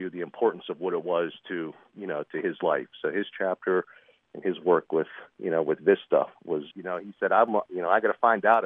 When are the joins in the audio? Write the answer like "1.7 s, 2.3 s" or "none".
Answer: 6.7 s